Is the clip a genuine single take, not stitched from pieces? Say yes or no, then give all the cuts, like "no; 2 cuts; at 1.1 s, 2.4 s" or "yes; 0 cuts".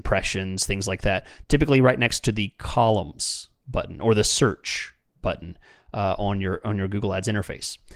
no; 1 cut; at 1.4 s